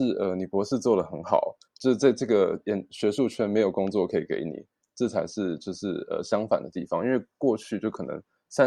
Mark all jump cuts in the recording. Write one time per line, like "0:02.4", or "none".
0:01.7